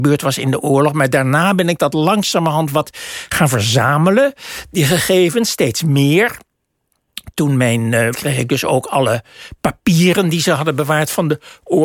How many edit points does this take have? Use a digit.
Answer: 1